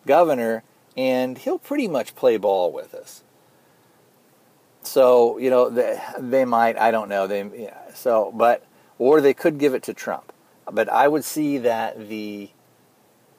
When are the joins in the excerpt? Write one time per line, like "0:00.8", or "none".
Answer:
none